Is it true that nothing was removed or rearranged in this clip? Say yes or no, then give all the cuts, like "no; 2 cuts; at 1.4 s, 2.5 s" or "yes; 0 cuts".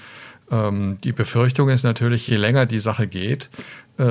yes; 0 cuts